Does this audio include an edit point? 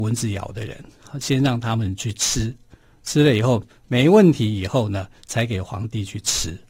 no; 0 cuts

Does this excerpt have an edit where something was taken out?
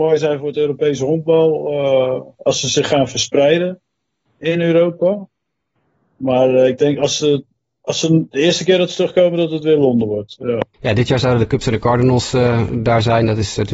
yes; 1 cut; at 10.7 s

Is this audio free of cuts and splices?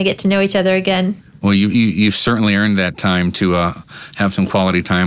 yes; 0 cuts

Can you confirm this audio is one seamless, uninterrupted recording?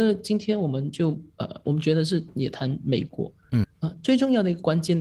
no; 2 cuts; at 1.6 s, 3.6 s

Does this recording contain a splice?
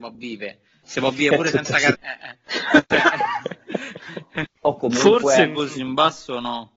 yes; 2 cuts; at 1.9 s, 4.5 s

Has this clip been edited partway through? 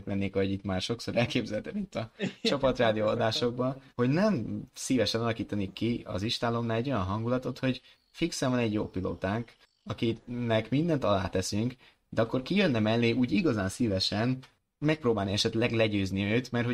yes; 1 cut; at 3.9 s

